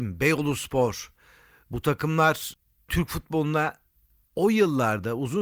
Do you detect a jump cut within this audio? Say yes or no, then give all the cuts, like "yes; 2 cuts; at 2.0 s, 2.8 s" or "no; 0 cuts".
no; 0 cuts